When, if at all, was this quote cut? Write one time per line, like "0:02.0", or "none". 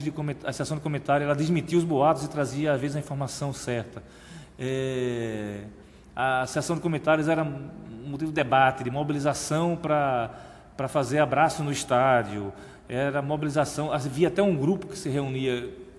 none